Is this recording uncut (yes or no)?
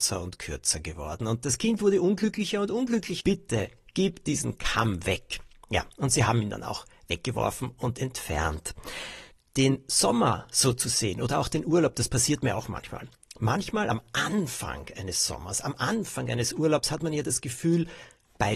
no